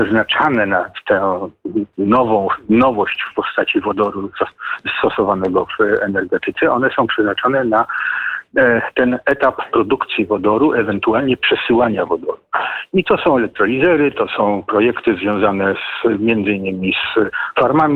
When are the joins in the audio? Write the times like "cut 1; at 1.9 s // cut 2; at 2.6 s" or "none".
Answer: none